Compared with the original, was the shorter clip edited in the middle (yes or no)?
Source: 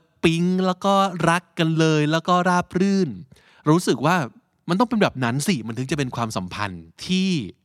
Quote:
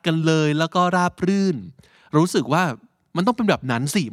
no